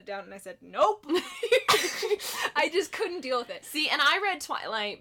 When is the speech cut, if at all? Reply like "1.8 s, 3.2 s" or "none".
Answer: none